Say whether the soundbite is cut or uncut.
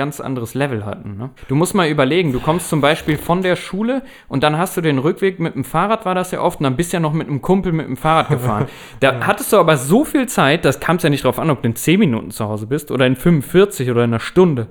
cut